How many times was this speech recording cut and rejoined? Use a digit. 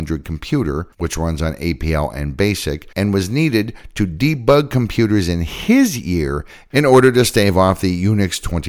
0